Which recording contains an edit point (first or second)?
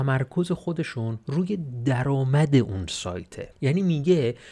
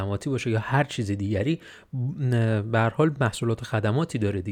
first